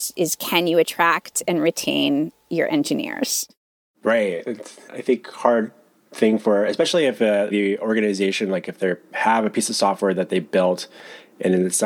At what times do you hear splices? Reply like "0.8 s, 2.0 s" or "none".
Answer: 4.9 s, 7.5 s